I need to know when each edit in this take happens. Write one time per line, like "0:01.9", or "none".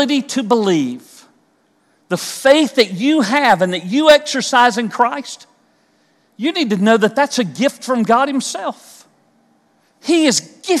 none